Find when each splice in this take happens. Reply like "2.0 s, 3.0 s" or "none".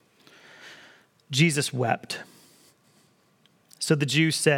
none